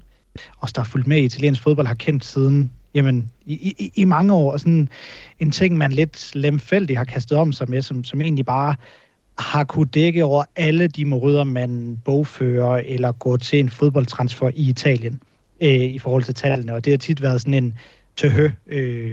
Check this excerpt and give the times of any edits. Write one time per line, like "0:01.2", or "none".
none

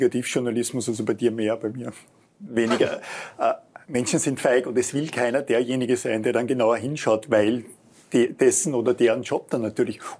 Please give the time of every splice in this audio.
0:03.8

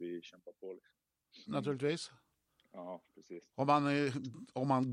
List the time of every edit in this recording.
0:01.5

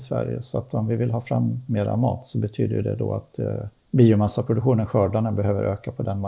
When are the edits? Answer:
none

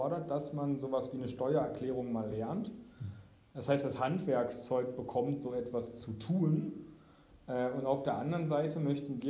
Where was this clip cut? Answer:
none

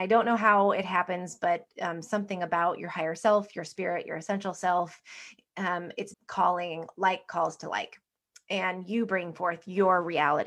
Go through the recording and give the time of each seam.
0:06.1

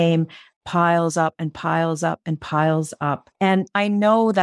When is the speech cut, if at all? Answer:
0:03.3

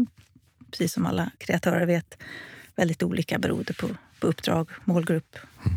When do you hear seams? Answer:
0:01.3

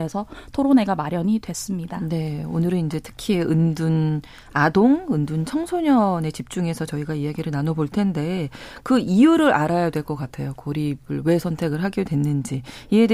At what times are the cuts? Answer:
none

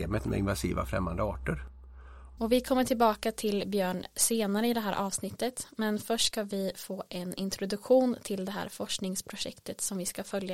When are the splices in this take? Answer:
0:02.4

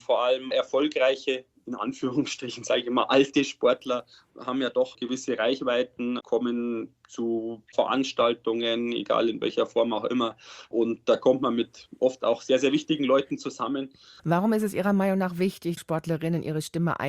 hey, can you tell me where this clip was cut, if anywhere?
0:14.2
0:15.8

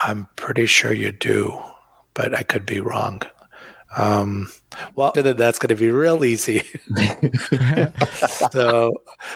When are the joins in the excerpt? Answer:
0:05.1

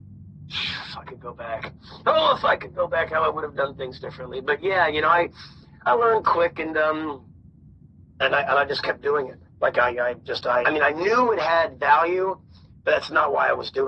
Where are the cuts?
0:06.2
0:10.6

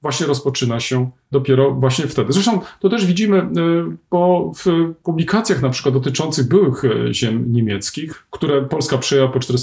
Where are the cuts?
none

